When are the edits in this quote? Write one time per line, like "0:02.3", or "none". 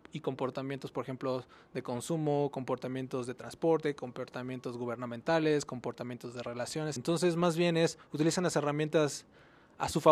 0:07.0